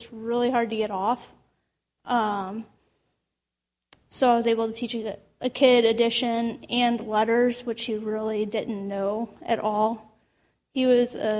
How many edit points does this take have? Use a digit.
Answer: 1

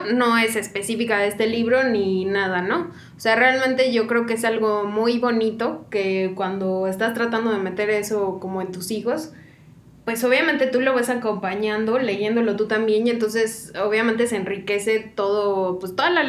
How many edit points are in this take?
0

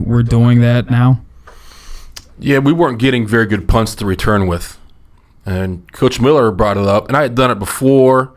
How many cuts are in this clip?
0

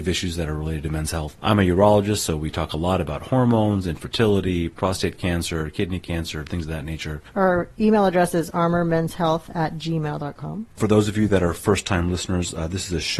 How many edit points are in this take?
1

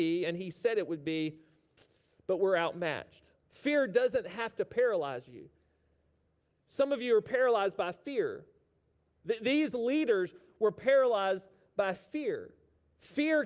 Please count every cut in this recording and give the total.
1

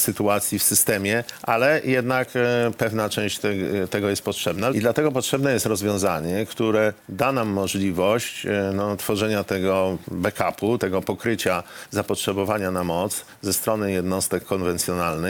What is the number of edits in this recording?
2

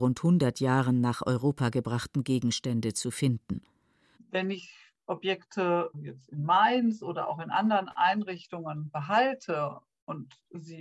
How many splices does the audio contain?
2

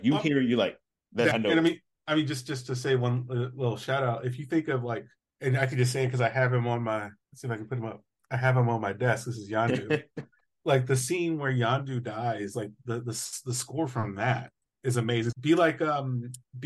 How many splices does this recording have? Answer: 2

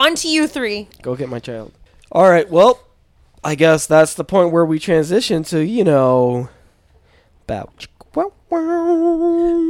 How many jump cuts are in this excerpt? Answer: 0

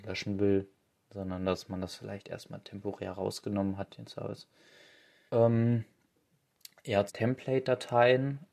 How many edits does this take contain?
2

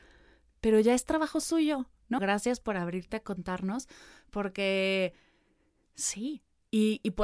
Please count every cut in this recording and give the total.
1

